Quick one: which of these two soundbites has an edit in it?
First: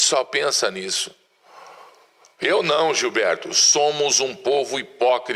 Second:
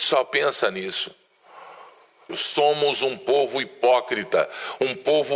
second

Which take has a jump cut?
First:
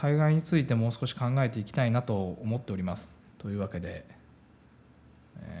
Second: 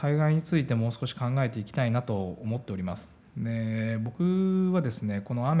first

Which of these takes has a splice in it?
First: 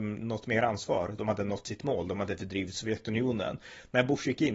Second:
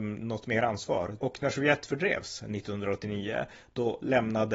second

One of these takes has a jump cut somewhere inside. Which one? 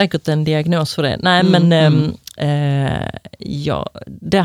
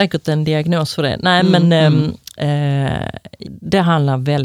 second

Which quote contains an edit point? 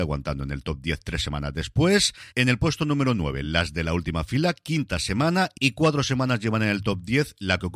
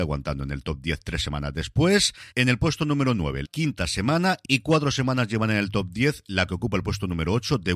second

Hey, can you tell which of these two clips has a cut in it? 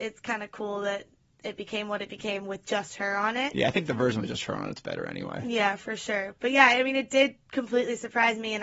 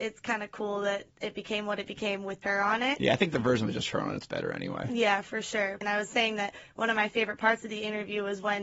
second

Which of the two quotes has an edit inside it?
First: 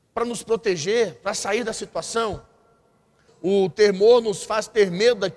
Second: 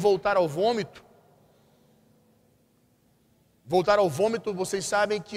first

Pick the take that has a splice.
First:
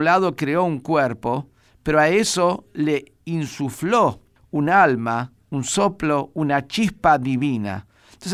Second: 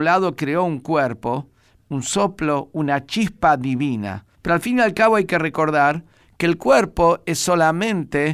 second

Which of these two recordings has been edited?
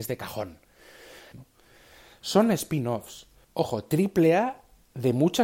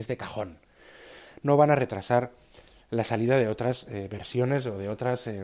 first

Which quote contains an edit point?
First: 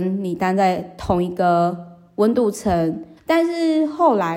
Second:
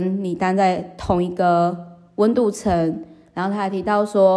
first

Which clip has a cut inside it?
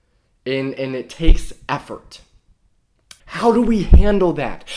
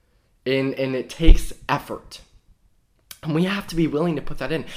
first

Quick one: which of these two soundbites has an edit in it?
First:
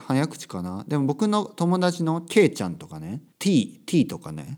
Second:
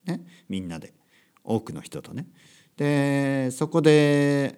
first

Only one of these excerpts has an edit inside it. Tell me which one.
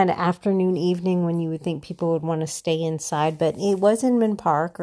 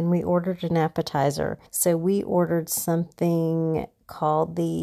second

